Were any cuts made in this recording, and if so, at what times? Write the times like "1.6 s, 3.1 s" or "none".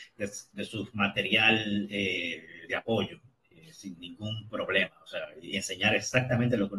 none